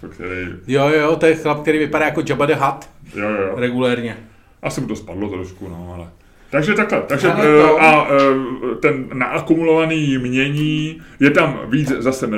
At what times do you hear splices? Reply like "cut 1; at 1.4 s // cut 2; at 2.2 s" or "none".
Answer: cut 1; at 4.6 s // cut 2; at 6.5 s